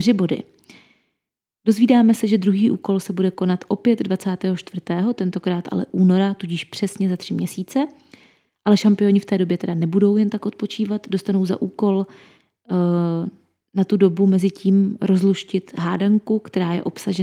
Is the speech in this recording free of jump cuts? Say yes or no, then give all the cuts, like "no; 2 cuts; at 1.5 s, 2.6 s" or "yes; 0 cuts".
yes; 0 cuts